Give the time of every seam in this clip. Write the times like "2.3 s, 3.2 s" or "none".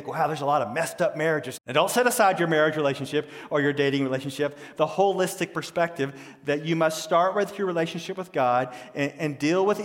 1.6 s, 4.8 s